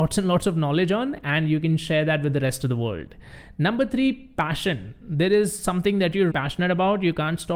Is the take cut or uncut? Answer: cut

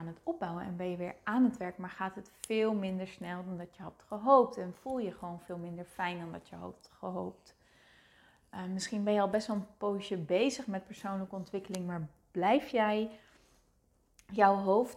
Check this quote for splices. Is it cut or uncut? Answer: uncut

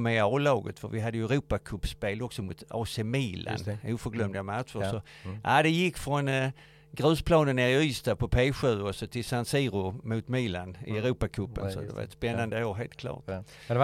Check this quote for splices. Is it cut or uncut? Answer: uncut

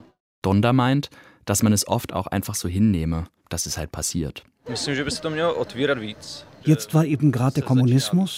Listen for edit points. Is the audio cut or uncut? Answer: cut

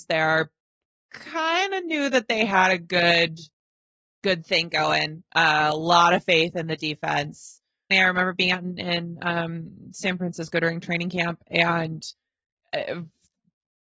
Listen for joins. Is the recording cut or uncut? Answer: cut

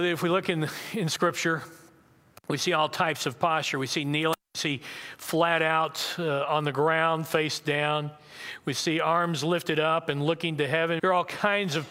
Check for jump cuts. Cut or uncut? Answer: cut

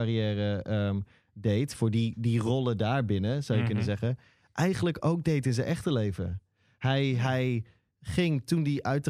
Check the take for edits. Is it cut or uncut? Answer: uncut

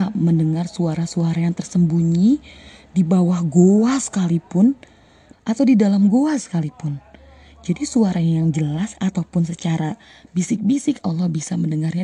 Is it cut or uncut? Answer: cut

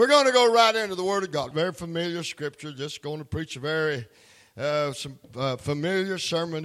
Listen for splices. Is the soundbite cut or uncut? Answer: cut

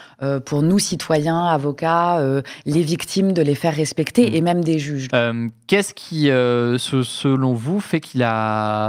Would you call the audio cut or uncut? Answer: cut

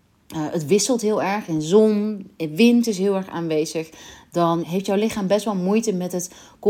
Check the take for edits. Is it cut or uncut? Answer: cut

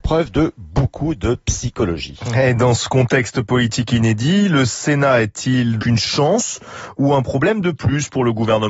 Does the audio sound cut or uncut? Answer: cut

